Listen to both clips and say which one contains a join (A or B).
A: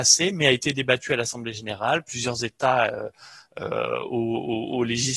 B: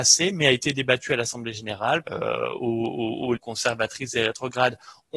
B